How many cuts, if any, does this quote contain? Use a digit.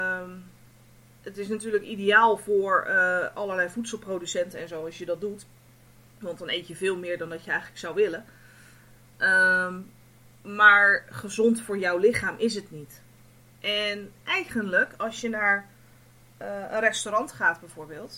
0